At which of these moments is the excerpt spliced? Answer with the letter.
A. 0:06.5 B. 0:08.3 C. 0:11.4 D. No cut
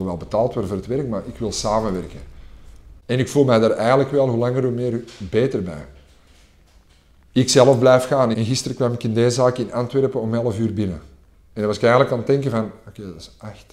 B